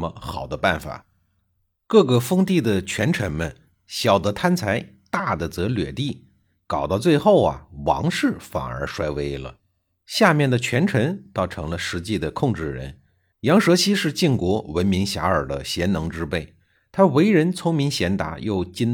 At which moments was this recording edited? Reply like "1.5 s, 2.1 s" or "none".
13.3 s